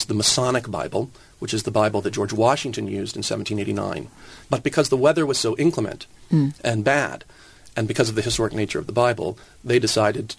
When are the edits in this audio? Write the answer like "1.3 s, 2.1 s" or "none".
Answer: 4.4 s